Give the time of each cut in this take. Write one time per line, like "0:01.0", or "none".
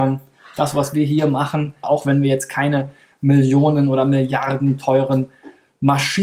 0:01.8